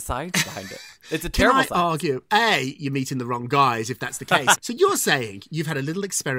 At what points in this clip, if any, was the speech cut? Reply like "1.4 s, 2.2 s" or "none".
4.6 s